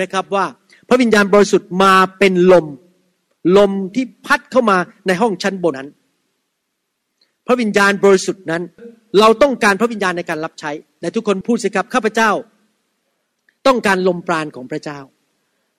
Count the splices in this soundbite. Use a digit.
1